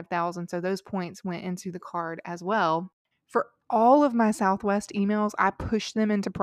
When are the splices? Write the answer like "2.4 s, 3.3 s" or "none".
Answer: 3.1 s